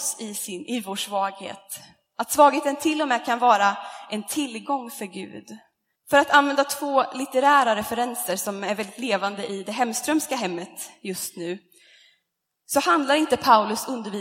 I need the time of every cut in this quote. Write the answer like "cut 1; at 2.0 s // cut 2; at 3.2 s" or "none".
cut 1; at 5.9 s